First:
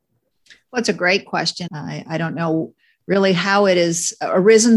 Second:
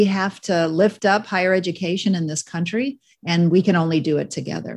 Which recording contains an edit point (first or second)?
first